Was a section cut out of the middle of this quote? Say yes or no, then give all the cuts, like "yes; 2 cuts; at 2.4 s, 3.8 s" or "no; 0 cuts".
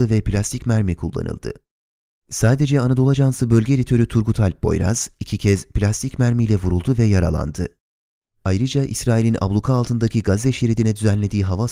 no; 0 cuts